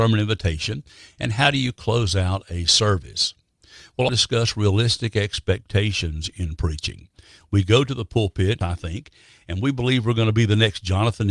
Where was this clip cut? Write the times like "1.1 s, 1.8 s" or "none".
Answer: 4.1 s, 8.6 s